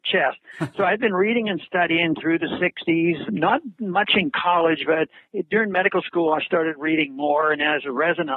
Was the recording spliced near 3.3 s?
yes; 1 cut; at 3.3 s

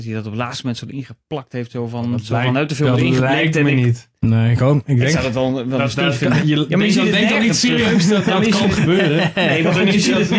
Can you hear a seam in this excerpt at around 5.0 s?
no; 2 cuts; at 6.4 s, 8.2 s

